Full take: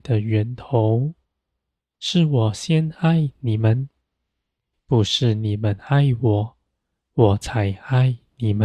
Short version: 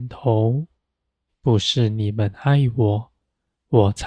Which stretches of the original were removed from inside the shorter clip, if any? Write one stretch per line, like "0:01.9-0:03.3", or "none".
0:01.7-0:04.7